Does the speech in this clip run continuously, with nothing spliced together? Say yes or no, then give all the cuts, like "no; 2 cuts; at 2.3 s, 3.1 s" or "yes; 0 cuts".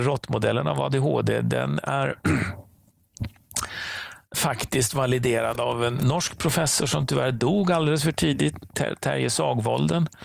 no; 1 cut; at 4.3 s